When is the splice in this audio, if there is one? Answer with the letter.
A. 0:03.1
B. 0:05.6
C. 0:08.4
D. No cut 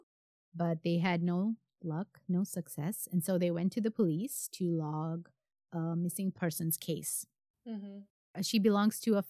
D